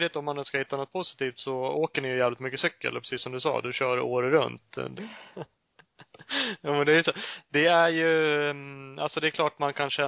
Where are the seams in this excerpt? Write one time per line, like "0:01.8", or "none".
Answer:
0:05.0